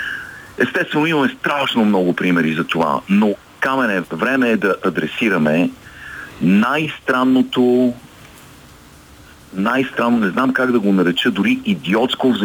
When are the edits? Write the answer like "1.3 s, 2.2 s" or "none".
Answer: 4.0 s